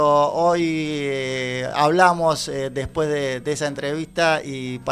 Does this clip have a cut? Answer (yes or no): no